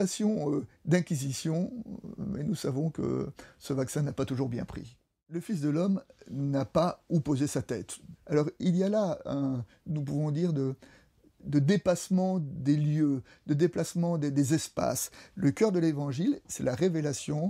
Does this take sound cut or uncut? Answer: cut